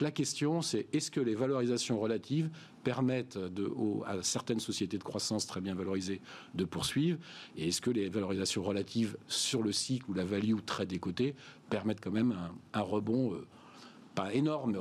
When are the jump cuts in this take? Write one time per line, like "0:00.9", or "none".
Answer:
none